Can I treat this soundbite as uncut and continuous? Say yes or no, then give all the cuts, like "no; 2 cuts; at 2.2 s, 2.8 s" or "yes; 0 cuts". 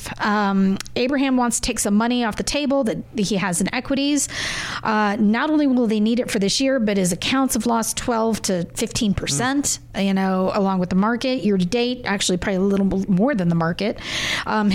yes; 0 cuts